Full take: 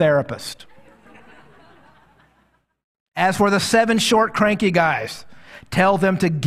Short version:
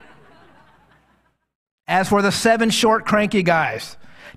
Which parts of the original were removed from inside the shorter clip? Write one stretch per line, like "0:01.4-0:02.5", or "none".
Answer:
none

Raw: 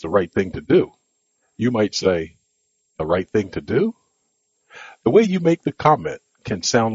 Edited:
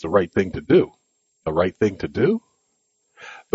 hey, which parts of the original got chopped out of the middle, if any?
0:01.3-0:02.8

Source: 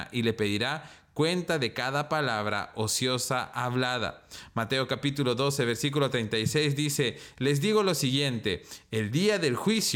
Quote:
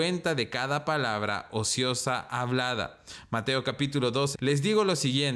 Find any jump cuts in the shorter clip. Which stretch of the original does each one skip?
0:05.6-0:07.3

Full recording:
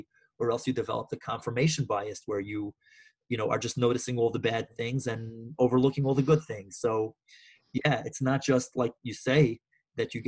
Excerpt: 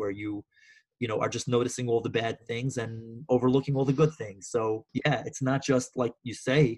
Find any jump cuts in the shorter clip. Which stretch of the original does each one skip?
0:07.2-0:07.7

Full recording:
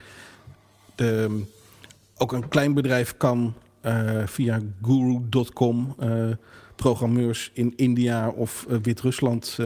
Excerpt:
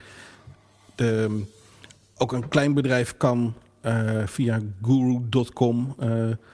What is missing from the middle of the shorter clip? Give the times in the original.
none

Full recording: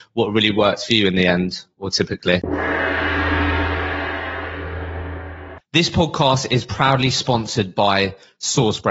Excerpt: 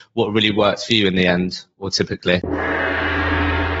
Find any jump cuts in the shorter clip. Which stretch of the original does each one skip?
none

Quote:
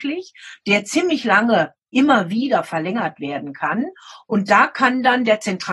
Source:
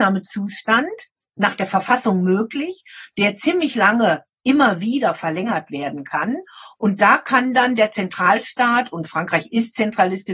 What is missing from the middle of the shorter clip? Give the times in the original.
none

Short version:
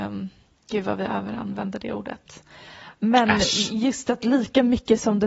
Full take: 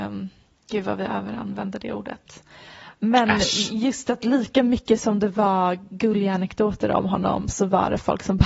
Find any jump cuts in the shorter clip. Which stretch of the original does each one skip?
none

